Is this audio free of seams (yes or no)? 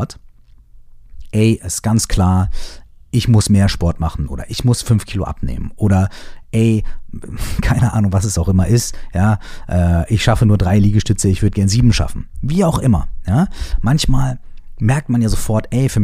yes